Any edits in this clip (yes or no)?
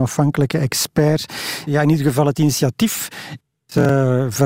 yes